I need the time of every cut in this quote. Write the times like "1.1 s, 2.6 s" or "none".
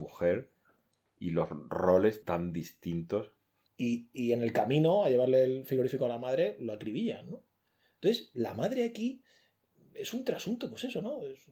3.7 s

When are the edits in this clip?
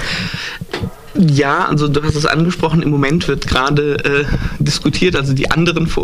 none

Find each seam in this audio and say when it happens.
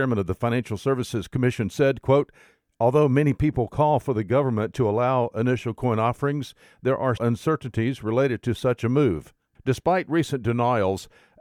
7.2 s, 9.6 s

